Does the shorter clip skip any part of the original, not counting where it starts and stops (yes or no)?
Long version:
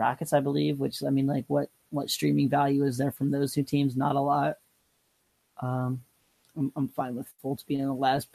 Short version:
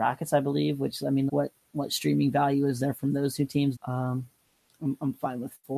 yes